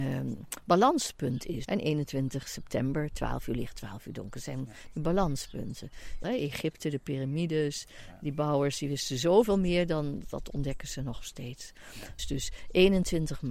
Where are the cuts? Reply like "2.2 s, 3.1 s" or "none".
1.6 s, 6.2 s, 12.2 s